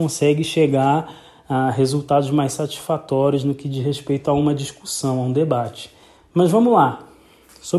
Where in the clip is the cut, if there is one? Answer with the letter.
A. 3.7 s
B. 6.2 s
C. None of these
B